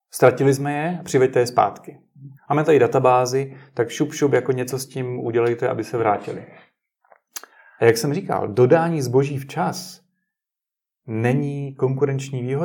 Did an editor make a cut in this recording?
yes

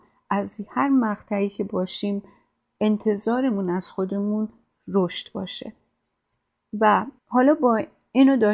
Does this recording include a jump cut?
yes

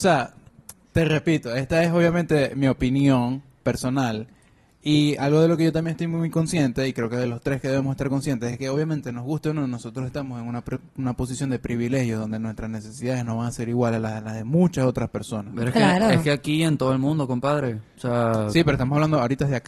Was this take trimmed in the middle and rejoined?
no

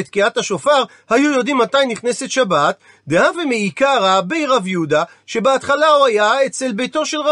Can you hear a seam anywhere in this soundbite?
no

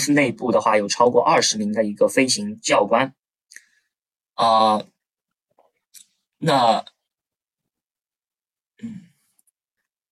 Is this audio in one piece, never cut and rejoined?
yes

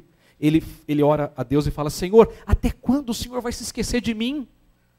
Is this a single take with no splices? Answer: yes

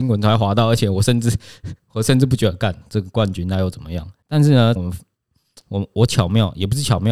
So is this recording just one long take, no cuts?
no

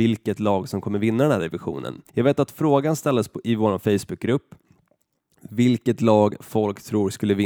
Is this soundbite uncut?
no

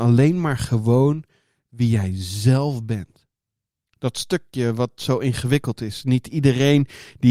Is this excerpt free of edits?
no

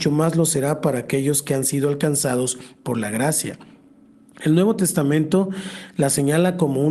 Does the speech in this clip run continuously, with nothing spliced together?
yes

